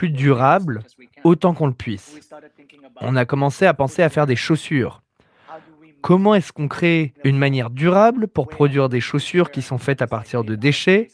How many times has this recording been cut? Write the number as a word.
one